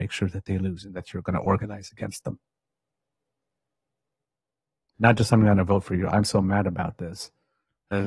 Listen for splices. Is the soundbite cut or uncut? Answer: uncut